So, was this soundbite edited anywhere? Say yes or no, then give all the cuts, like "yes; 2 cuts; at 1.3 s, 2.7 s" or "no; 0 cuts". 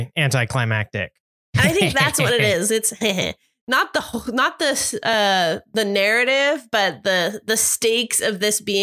no; 0 cuts